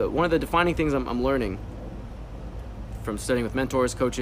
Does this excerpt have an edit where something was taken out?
no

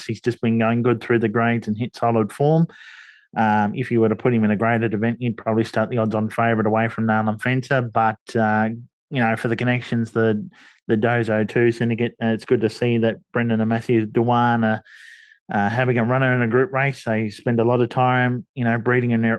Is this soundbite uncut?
yes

